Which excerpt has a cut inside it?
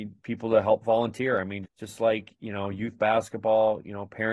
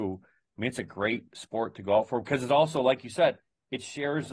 first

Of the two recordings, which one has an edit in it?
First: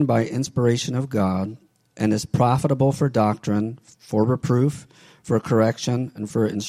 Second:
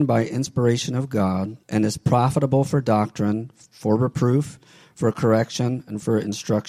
second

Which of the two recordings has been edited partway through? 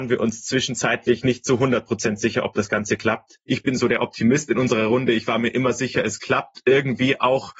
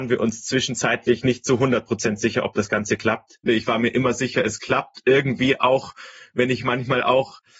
second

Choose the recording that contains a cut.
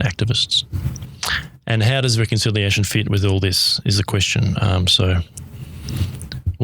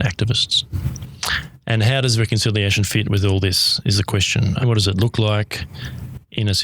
second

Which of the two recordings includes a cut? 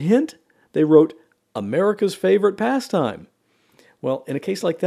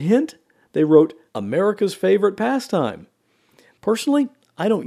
second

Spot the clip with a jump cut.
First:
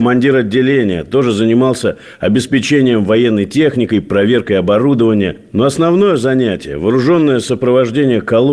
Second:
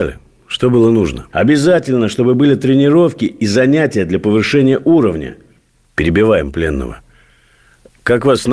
second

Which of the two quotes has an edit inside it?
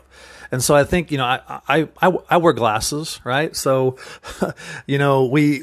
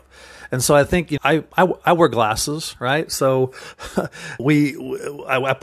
second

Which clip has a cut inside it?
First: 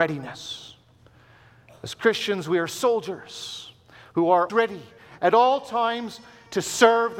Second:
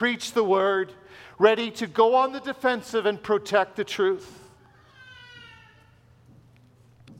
first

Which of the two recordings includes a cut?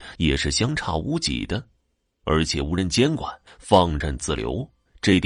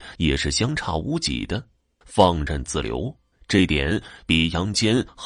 second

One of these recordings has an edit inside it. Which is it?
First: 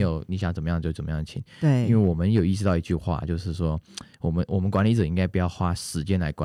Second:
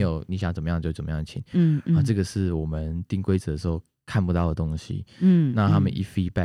second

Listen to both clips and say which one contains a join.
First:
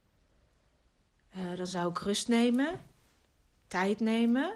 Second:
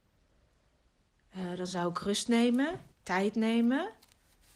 second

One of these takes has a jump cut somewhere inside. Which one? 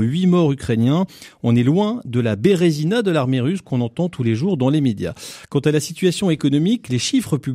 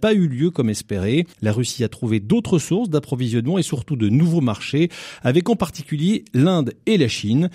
second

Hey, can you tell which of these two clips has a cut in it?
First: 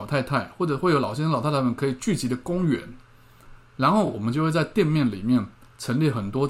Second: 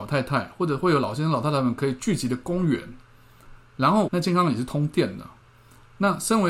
second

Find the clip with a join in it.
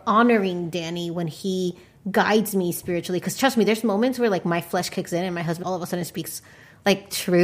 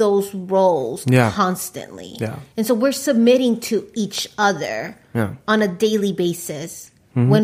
first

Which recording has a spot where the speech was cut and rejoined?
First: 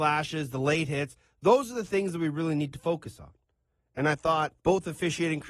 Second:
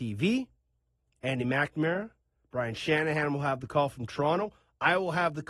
first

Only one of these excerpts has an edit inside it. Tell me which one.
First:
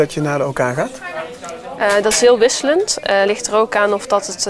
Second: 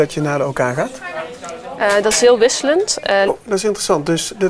second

